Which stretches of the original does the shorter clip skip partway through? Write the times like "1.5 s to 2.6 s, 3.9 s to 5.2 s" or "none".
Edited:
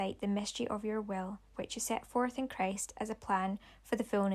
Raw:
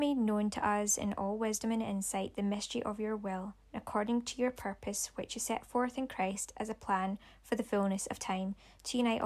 3.7 s to 5.1 s

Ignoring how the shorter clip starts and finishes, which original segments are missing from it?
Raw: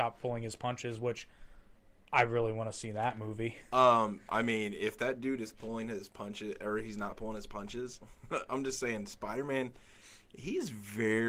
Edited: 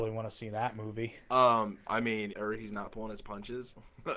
4.7 s to 6.6 s

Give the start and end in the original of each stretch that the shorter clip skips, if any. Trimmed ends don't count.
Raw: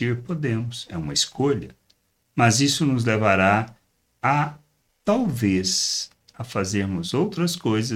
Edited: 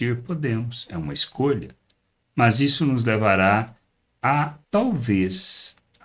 4.6 s to 5.0 s

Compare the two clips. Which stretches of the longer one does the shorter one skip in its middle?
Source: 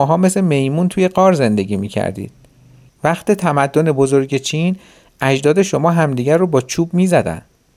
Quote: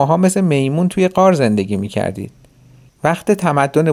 none

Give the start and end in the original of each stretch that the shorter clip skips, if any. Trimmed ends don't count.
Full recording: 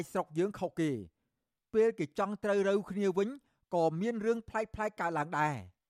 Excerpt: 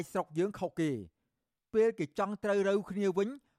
none

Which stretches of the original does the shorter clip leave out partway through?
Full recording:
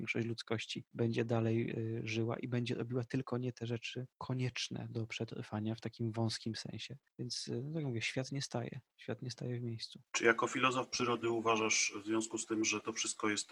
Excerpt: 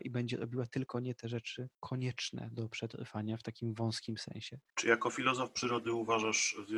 7.1 s to 10.1 s

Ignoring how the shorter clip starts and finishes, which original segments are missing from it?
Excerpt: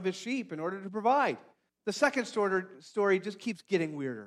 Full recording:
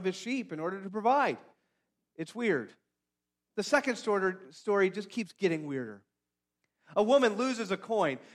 1.7 s to 3.4 s

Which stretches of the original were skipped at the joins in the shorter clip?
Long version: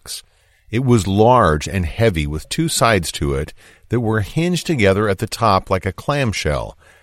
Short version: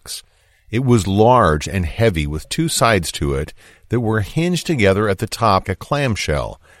5.6 s to 5.8 s

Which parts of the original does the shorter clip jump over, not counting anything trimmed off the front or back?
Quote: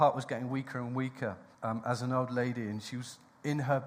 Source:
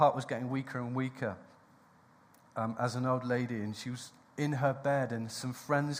1.5 s to 2.5 s

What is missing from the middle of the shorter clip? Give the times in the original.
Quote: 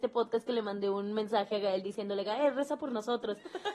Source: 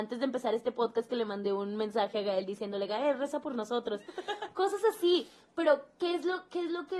none

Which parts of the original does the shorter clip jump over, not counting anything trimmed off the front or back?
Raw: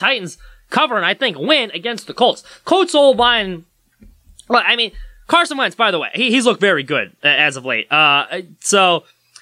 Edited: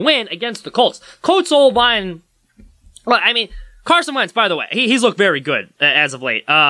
none

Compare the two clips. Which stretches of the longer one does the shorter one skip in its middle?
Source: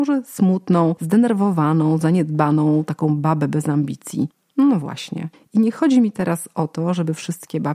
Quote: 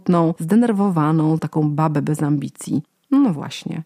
2.0 s to 2.8 s

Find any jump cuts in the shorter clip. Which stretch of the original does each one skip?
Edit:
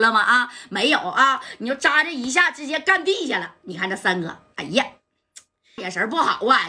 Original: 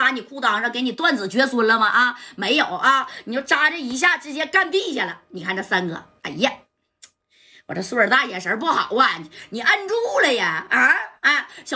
7.4 s to 8.3 s

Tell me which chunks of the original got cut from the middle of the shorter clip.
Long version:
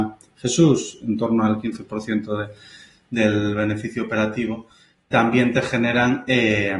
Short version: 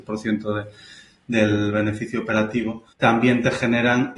4.7 s to 5.0 s

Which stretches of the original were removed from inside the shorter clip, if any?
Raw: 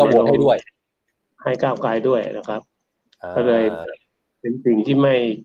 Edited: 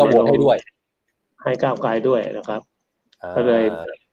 none

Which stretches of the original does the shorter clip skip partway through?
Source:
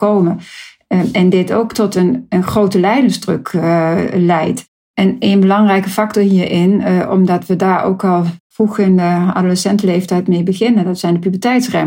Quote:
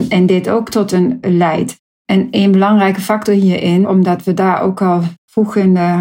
2.3 s to 4.1 s, 6.7 s to 7.1 s

